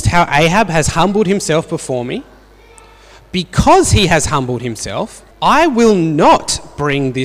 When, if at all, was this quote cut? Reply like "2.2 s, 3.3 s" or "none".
5.3 s